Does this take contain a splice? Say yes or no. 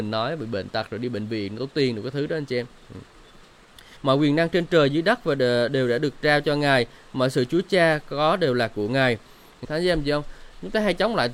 yes